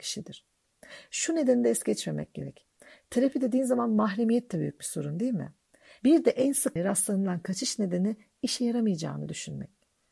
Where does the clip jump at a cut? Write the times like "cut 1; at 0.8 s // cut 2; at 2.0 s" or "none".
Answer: cut 1; at 6.0 s

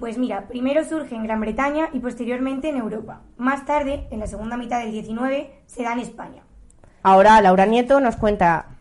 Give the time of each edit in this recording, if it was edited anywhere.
cut 1; at 7.0 s

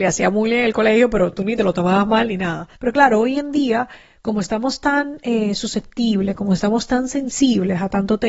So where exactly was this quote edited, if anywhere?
cut 1; at 2.8 s

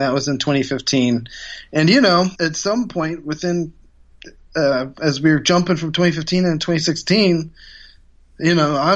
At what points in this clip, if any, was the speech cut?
cut 1; at 2.3 s

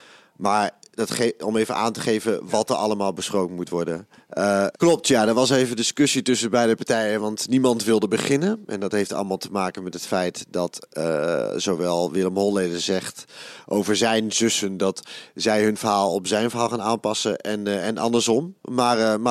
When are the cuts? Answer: cut 1; at 4.7 s

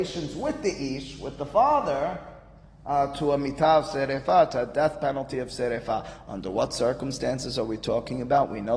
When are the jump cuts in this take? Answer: none

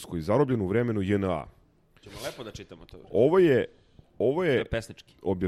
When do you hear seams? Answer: cut 1; at 2.0 s

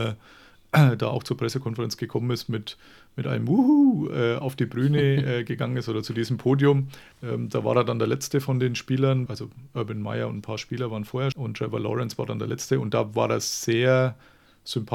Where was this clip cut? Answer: cut 1; at 7.1 s // cut 2; at 9.3 s // cut 3; at 11.3 s

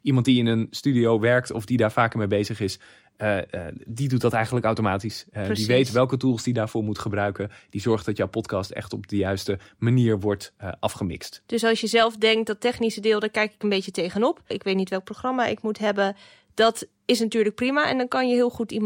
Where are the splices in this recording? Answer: cut 1; at 14.5 s

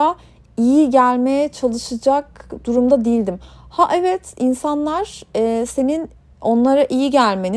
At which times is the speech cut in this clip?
none

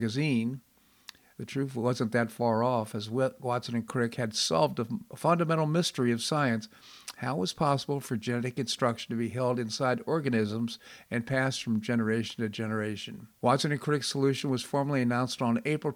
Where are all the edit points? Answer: cut 1; at 1.3 s // cut 2; at 13.4 s

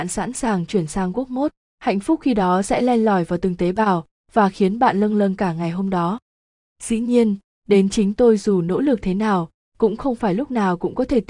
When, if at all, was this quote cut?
none

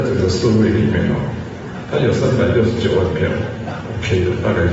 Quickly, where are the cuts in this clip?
none

